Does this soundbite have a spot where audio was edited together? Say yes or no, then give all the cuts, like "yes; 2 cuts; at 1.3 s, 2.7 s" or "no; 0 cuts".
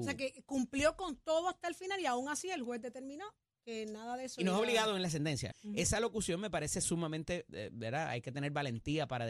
yes; 2 cuts; at 5.5 s, 7.5 s